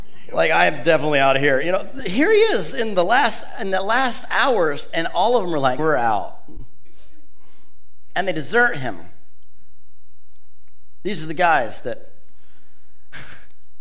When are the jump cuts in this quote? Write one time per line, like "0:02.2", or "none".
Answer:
0:05.8